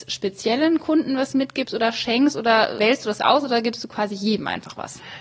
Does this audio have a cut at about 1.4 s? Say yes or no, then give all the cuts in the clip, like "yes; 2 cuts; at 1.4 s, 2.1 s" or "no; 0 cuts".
no; 1 cut; at 2.8 s